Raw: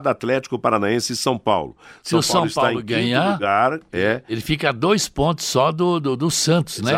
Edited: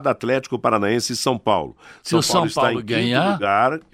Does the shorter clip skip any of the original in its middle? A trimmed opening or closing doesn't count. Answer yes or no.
no